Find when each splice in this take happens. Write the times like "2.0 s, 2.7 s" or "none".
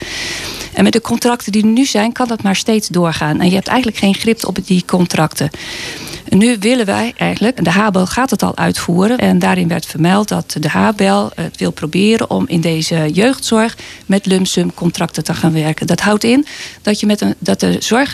7.6 s, 9.2 s